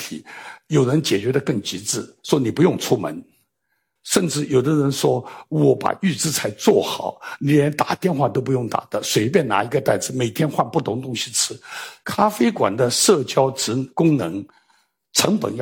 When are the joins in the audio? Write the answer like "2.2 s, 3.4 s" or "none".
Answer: 4.0 s, 12.0 s